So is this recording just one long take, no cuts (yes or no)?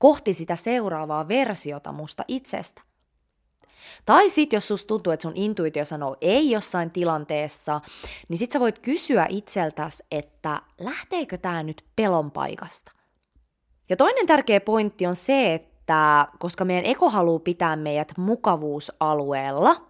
no